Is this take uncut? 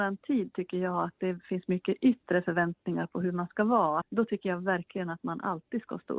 no; 1 cut; at 4.0 s

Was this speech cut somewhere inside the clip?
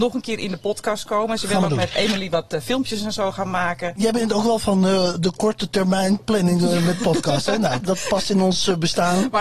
no; 0 cuts

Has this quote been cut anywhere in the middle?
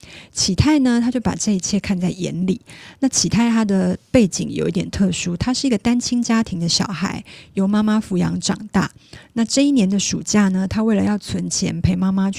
no; 0 cuts

